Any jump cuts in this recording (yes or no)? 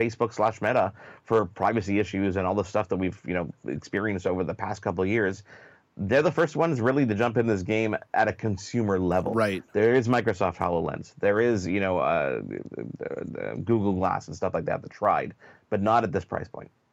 no